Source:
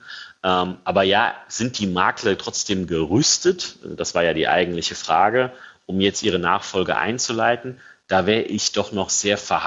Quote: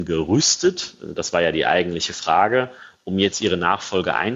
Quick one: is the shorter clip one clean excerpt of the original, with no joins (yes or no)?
yes